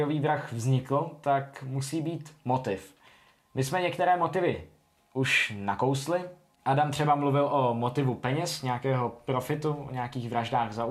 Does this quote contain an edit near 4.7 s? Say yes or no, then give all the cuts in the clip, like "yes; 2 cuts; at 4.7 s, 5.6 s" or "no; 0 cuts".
no; 0 cuts